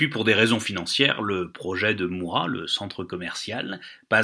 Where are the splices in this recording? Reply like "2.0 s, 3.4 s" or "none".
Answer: none